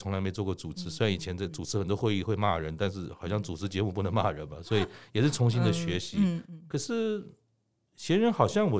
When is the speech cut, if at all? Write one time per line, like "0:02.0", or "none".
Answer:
0:06.4